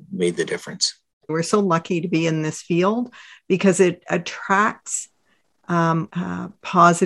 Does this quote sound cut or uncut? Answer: cut